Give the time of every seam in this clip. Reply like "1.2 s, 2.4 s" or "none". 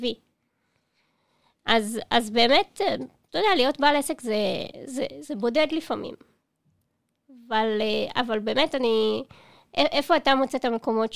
none